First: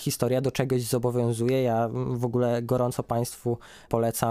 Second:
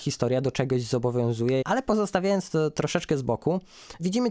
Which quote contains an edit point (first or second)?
second